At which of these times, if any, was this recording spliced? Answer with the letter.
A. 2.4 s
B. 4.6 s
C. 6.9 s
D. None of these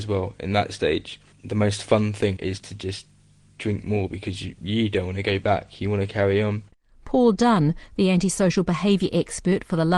A